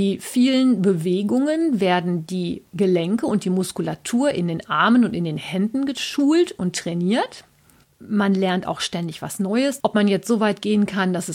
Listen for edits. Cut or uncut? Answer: cut